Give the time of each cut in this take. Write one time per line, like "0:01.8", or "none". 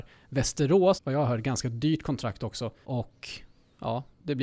0:01.0
0:02.8